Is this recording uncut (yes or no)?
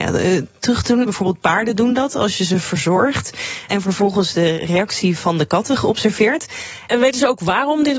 no